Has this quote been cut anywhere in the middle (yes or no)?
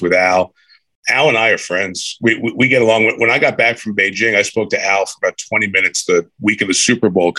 no